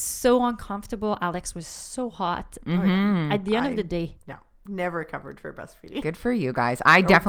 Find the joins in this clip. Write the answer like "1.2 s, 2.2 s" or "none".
none